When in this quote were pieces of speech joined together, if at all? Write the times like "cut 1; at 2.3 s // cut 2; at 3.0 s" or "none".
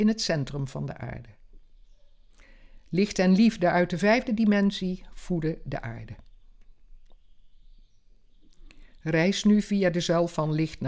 none